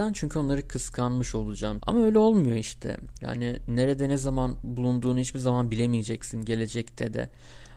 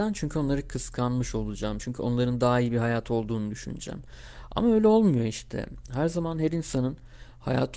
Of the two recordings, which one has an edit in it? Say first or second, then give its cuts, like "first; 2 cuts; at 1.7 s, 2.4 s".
first; 2 cuts; at 1.8 s, 3.2 s